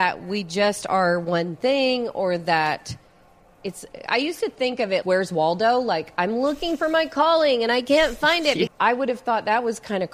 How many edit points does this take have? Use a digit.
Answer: 2